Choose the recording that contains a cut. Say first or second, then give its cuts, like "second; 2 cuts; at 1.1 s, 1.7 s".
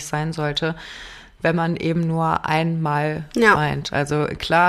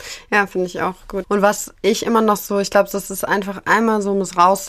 second; 1 cut; at 1.2 s